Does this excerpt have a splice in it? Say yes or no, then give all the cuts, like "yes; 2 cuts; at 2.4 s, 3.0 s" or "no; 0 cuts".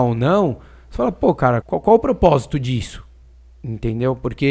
yes; 1 cut; at 1.6 s